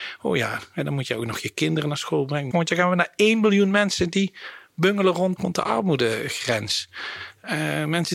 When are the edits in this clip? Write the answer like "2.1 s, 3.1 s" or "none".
2.5 s, 5.4 s

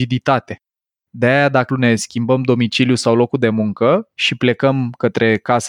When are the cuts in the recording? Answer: 1.7 s, 4.1 s

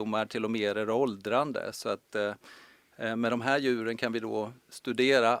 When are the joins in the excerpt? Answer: none

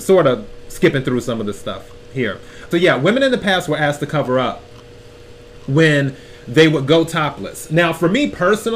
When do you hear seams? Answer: 2.7 s

